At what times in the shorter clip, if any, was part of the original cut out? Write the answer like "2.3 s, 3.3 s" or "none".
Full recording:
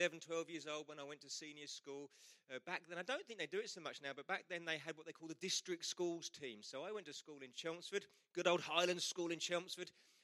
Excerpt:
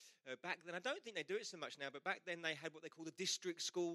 none